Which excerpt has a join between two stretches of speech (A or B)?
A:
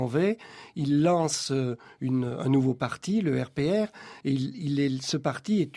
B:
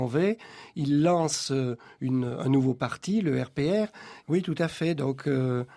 B